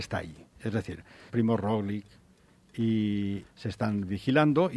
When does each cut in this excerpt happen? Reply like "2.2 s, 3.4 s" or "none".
1.3 s, 3.4 s